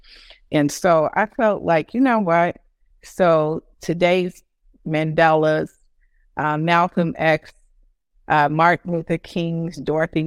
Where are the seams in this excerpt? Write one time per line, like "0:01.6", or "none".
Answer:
0:02.9